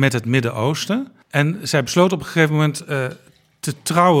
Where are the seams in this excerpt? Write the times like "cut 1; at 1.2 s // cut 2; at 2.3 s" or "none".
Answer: cut 1; at 1.2 s